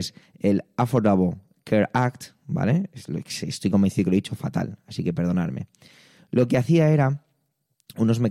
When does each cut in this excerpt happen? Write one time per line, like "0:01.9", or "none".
none